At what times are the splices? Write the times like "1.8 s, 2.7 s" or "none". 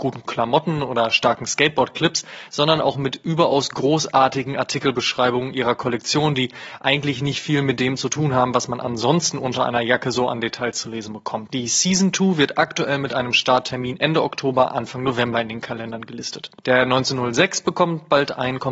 11.5 s, 16.6 s